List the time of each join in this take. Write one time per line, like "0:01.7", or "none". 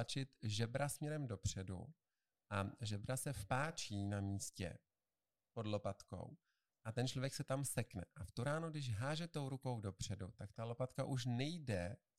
none